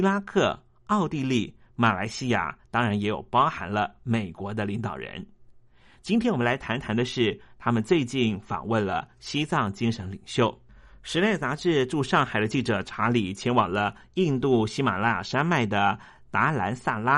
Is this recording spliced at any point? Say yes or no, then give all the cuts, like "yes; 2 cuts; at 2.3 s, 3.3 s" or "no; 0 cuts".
no; 0 cuts